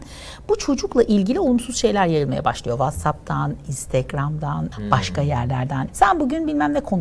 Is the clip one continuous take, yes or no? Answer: no